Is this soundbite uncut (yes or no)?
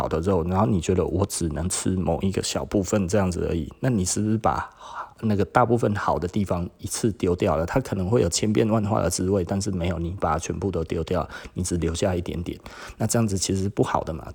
yes